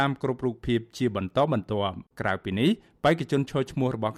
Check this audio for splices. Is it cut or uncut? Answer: cut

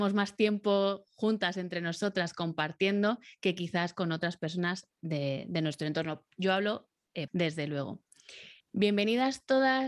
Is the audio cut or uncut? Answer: cut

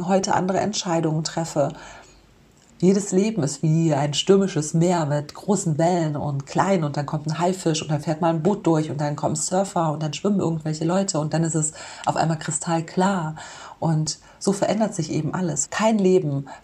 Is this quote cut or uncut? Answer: cut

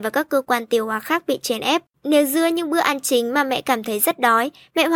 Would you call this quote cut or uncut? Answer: cut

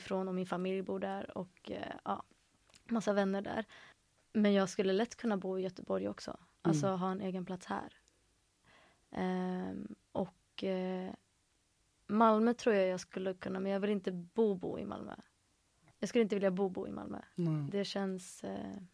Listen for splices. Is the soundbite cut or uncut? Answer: uncut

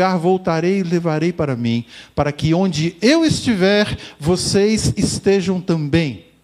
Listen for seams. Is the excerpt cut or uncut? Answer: uncut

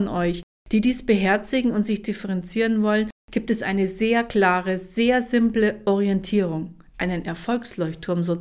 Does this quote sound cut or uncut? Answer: uncut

